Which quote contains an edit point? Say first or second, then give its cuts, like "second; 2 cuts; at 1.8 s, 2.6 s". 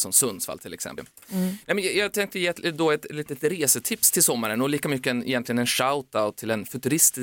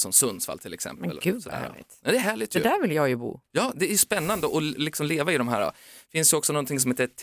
first; 1 cut; at 1.0 s